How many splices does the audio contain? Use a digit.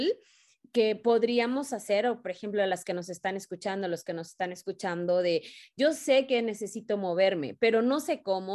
0